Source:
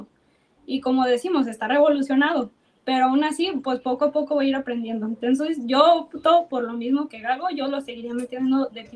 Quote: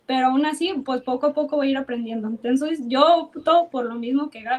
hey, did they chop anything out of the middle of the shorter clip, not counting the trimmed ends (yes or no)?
no